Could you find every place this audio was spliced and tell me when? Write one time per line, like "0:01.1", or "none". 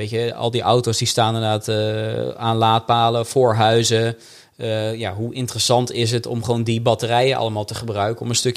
none